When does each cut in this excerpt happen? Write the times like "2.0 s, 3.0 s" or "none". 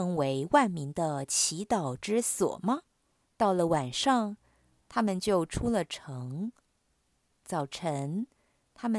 3.2 s

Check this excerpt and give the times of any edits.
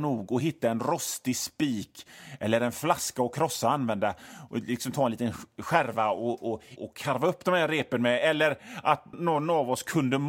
6.8 s, 9.1 s

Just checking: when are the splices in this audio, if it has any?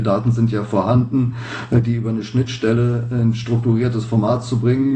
none

